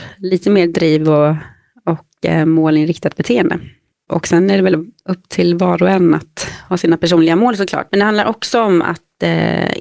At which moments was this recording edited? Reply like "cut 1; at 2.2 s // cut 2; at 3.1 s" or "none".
cut 1; at 3.9 s // cut 2; at 7.9 s